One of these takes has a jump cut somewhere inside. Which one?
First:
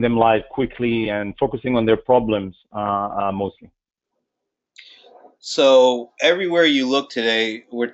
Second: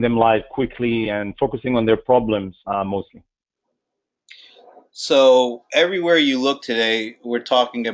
second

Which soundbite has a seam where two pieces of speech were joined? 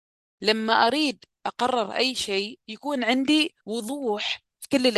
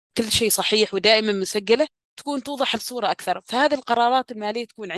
first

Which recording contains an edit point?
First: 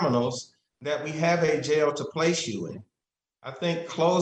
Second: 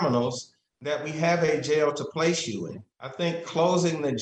second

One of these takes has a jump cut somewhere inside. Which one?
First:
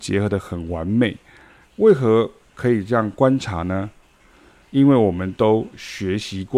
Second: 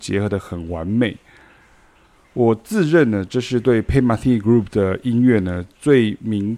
first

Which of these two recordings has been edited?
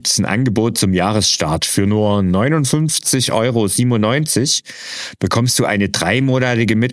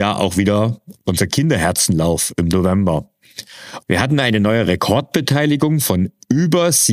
second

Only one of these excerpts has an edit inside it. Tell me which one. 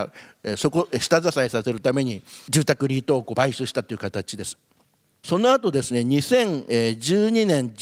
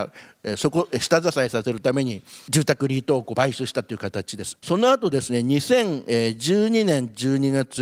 second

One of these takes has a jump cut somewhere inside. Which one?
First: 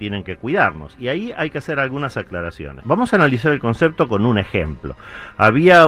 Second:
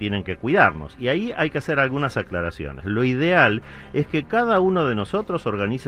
first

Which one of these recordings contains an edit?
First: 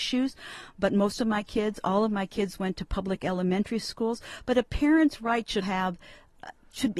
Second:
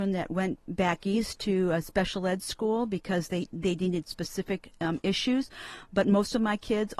first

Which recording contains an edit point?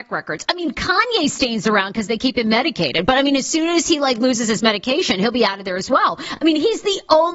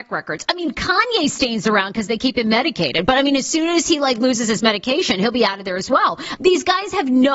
second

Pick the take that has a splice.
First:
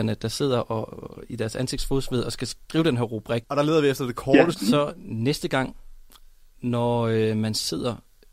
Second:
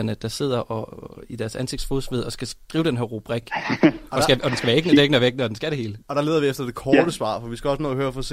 first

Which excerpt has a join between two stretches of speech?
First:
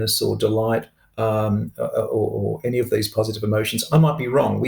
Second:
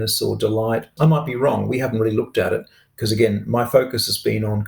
second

